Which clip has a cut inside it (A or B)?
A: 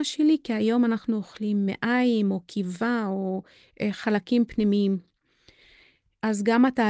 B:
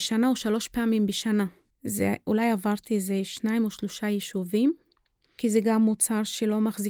B